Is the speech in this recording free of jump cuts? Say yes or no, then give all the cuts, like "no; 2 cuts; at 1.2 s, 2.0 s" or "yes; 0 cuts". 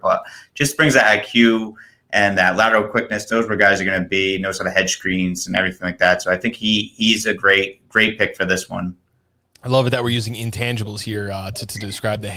yes; 0 cuts